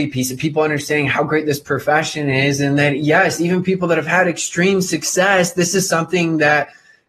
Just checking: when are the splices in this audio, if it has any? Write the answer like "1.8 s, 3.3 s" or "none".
none